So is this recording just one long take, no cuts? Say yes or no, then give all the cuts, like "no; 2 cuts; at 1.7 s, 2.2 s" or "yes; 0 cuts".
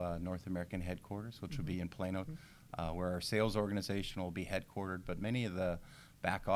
no; 1 cut; at 2.2 s